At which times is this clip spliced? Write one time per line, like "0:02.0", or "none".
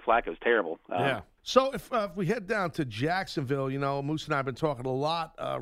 0:01.4